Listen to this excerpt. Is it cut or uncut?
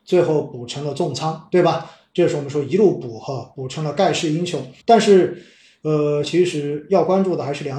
cut